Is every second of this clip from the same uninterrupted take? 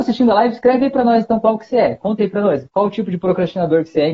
yes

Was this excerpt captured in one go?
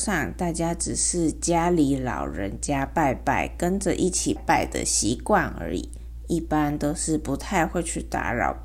no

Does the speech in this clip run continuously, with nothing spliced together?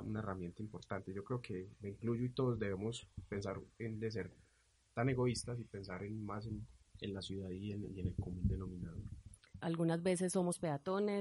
no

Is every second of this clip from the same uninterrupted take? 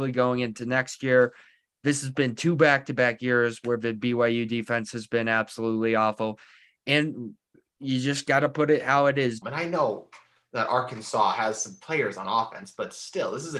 no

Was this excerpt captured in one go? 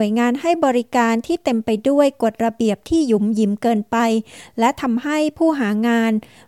yes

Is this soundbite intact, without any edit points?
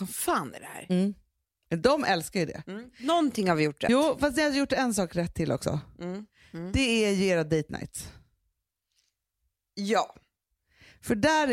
yes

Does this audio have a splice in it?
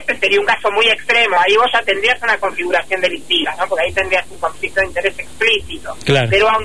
no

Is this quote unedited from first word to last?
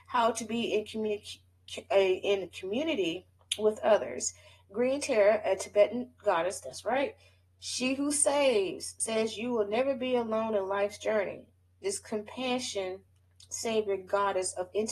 yes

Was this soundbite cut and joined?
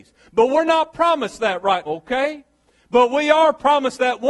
yes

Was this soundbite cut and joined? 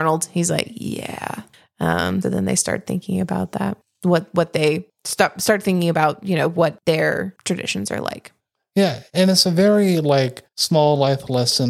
yes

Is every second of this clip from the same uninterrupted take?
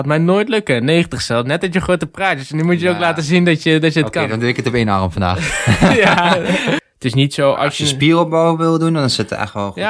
no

